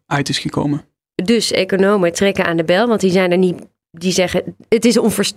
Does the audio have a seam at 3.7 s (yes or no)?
no